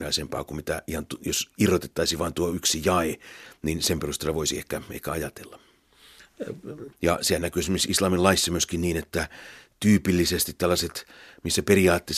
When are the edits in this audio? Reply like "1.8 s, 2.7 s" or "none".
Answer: 6.9 s

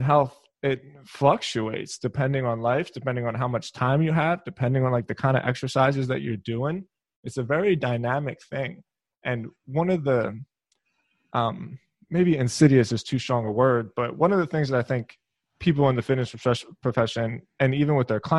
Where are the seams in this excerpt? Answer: none

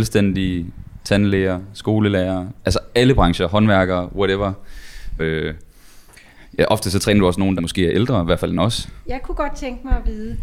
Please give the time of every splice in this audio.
5.2 s, 7.6 s, 9.0 s

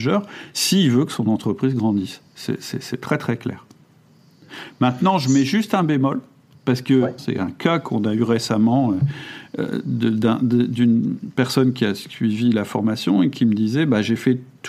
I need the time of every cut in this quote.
7.2 s

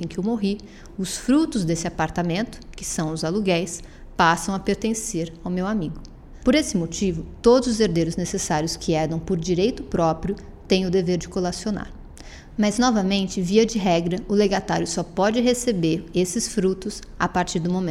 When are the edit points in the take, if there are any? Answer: 6.4 s, 12.5 s

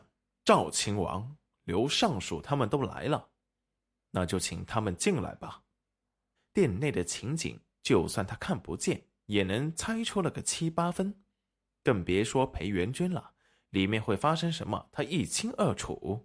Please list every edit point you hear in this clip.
6.4 s

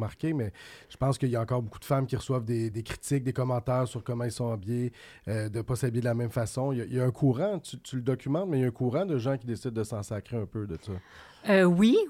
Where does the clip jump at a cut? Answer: 2.7 s

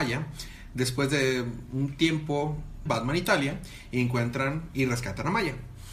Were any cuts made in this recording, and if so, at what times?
2.9 s

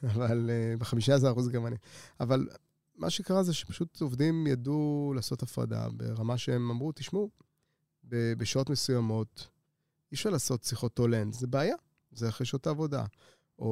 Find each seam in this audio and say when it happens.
11.3 s

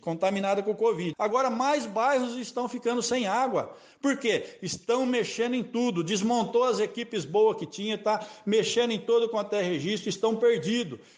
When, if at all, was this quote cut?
1.1 s

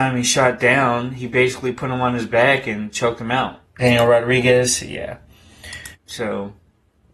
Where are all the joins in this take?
3.6 s, 5.9 s

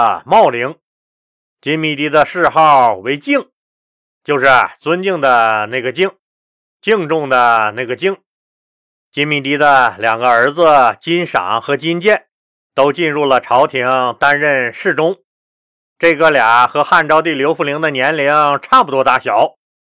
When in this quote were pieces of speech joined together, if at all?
none

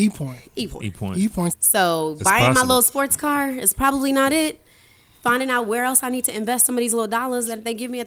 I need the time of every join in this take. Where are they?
1.5 s

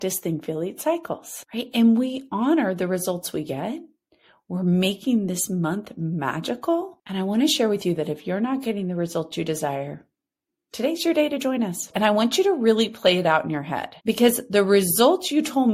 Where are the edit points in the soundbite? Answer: 11.9 s, 14.0 s

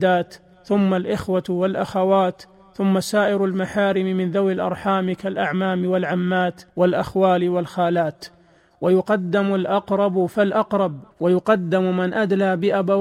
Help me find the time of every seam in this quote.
6.7 s, 11.1 s

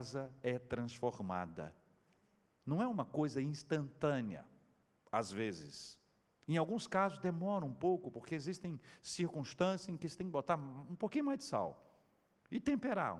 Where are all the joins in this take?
2.5 s

